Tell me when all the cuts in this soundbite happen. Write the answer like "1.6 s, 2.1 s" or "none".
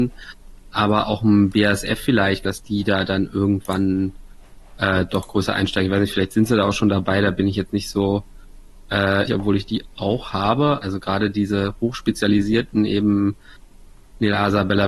2.5 s, 9.3 s, 10.8 s